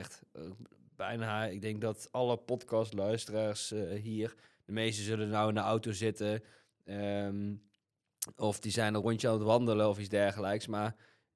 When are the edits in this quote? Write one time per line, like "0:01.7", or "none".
none

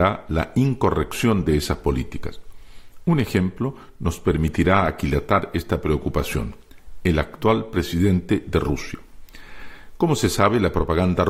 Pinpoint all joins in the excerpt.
none

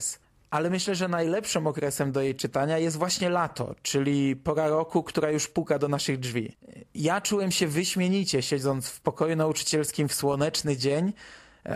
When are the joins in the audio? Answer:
none

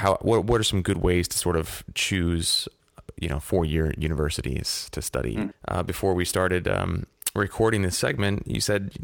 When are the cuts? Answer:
0:05.5

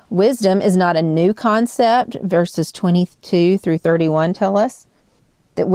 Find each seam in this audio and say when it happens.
none

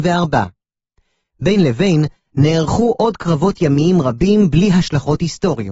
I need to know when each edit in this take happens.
none

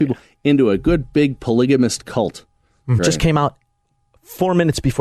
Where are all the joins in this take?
0:03.0

